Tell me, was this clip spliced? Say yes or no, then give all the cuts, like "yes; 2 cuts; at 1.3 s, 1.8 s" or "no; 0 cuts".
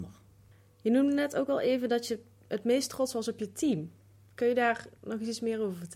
no; 0 cuts